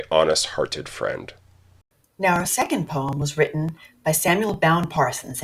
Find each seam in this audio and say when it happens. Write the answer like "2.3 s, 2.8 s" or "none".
2.0 s